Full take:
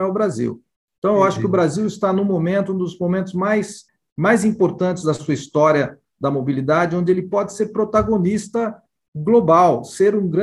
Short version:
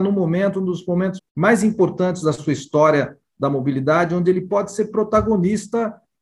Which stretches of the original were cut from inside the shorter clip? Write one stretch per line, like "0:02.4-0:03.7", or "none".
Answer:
0:03.3-0:04.0